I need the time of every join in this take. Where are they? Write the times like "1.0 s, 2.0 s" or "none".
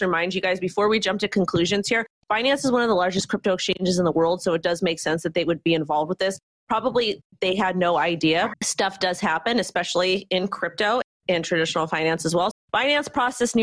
8.5 s, 12.5 s